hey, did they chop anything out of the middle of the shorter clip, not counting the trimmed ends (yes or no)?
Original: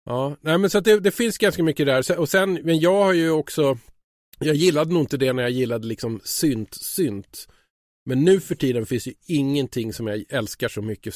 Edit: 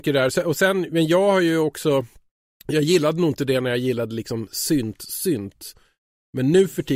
no